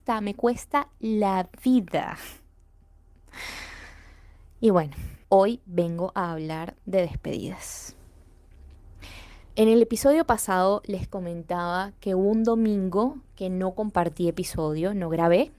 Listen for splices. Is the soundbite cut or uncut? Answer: cut